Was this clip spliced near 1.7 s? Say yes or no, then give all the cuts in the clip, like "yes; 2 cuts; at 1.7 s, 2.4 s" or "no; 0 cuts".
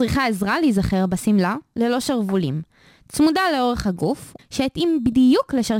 yes; 2 cuts; at 1.7 s, 4.4 s